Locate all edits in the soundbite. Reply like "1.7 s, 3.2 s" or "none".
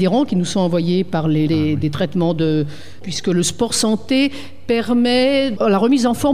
1.5 s, 3.0 s

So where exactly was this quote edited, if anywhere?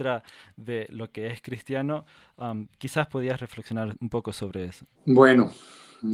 4.9 s

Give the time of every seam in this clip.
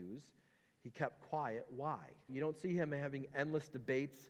2.3 s

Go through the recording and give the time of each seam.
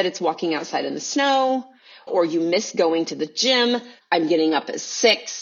2.1 s, 4.0 s

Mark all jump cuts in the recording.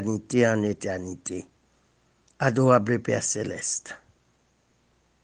2.3 s

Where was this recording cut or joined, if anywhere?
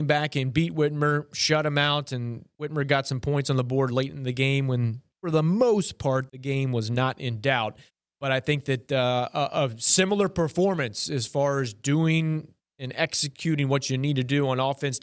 6.3 s

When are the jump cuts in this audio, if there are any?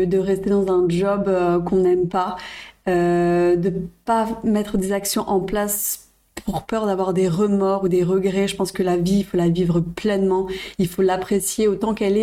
none

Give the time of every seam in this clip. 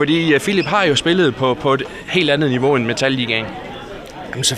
none

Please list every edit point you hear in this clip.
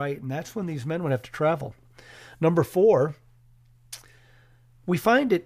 none

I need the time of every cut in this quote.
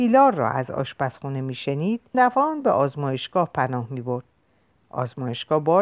2.1 s

